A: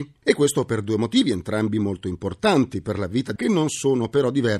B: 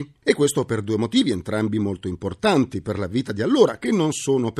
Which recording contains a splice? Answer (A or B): A